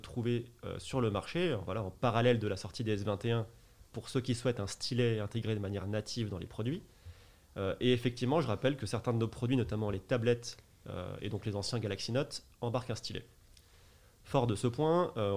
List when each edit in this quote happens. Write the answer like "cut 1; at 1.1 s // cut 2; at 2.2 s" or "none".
none